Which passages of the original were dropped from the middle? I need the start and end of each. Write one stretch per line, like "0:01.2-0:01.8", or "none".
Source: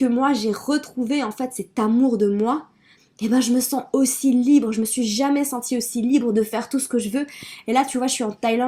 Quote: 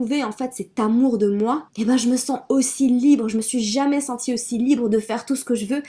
0:02.7-0:03.1